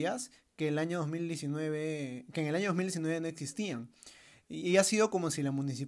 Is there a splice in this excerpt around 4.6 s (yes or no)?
yes